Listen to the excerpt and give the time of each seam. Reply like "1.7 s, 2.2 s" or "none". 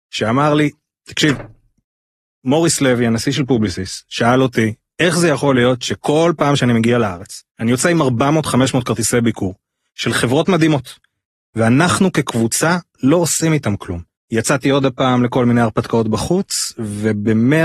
7.5 s, 14.1 s